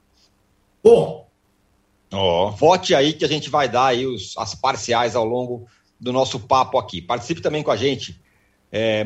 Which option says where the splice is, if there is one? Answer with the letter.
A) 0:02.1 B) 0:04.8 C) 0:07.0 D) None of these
A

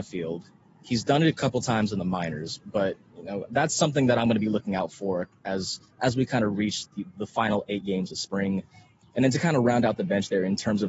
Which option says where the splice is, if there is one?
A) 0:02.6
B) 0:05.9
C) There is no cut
B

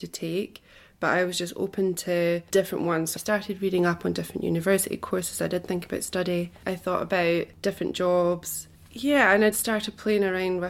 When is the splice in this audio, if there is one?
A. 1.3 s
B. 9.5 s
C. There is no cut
B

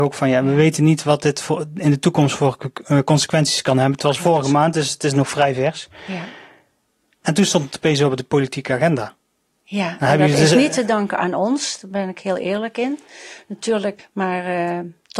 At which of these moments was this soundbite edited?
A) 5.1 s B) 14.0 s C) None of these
B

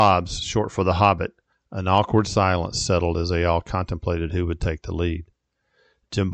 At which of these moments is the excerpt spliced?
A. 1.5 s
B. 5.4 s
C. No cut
A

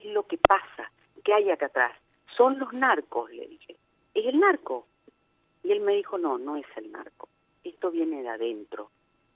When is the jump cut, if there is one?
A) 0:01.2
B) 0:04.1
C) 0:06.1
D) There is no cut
D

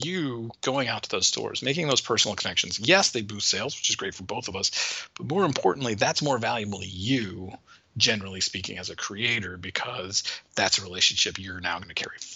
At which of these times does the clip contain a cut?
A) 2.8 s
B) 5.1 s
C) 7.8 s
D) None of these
D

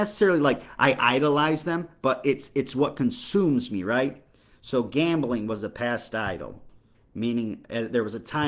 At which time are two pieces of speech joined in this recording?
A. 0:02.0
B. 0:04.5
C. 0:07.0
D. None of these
D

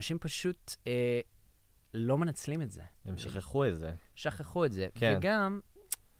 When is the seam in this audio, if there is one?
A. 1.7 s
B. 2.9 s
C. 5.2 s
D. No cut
B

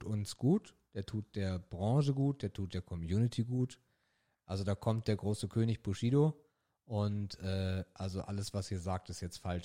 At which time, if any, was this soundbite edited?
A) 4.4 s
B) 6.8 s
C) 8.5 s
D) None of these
A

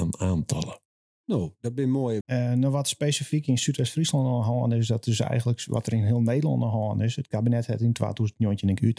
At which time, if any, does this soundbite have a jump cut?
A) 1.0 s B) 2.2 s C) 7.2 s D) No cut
B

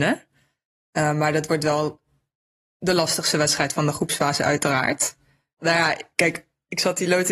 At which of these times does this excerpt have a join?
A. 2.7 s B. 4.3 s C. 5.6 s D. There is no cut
C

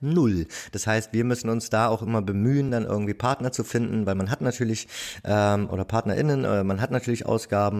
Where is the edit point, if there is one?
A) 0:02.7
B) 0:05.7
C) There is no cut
C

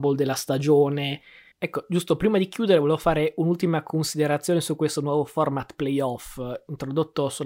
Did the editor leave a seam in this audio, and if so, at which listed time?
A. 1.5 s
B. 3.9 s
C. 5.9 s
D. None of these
A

